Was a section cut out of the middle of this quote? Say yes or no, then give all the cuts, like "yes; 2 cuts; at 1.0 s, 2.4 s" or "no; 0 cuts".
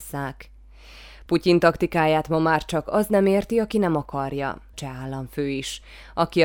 yes; 1 cut; at 4.7 s